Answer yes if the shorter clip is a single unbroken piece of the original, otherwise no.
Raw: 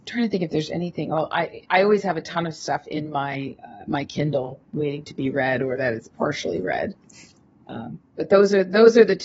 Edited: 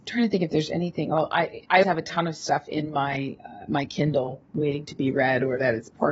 no